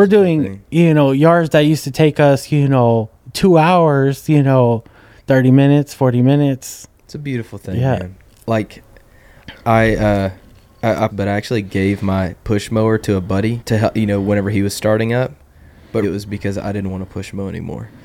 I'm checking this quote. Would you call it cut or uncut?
cut